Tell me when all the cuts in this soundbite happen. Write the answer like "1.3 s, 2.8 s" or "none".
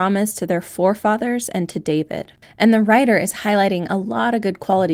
2.4 s

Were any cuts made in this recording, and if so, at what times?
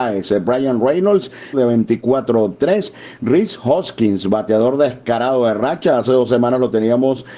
1.5 s

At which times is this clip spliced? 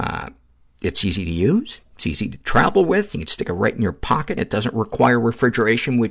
4.4 s

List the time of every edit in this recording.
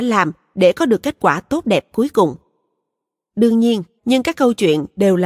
4.0 s

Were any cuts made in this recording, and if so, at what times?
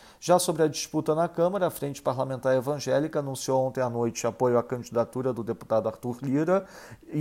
none

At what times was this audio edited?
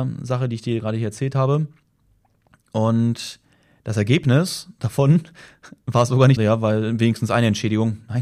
6.4 s

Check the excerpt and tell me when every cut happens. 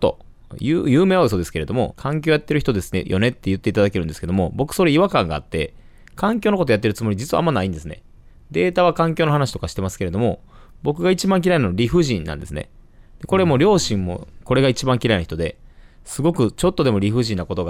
1.9 s

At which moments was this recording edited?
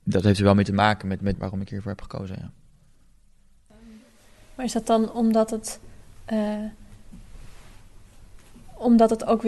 1.3 s

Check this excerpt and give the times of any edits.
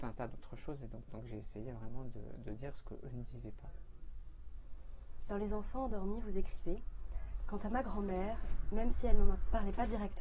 1.1 s

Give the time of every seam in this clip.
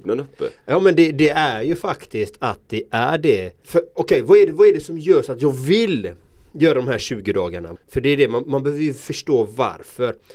3.6 s, 7.8 s

